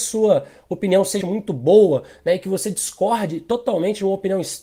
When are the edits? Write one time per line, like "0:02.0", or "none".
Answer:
0:01.2

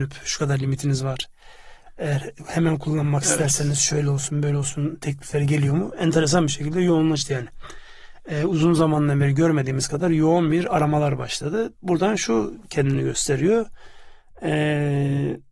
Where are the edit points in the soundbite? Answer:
none

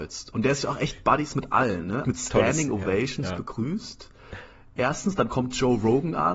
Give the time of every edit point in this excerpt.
0:02.0

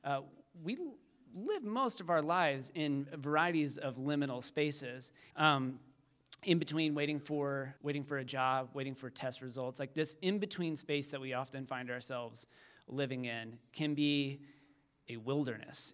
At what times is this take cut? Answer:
0:05.3
0:07.8

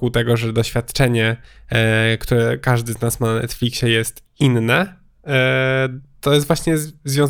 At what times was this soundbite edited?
none

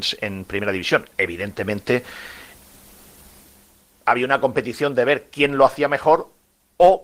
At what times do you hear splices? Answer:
none

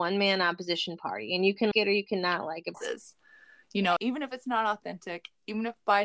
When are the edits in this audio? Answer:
0:01.7
0:02.7
0:04.0

